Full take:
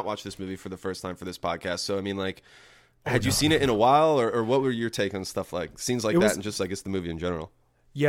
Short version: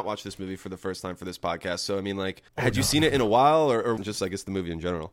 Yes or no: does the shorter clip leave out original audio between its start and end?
yes